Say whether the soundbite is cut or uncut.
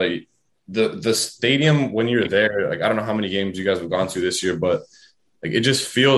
uncut